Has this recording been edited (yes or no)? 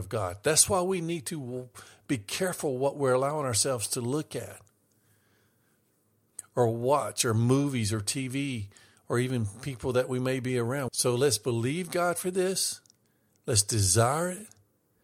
yes